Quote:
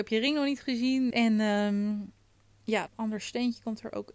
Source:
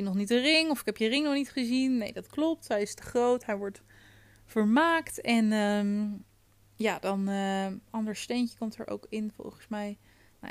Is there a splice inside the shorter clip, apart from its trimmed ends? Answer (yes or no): yes